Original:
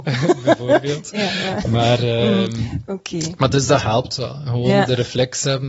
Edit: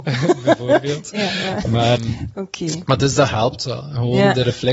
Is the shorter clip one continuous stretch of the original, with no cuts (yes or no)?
no